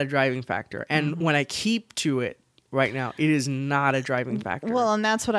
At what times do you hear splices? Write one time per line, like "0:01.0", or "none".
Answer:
none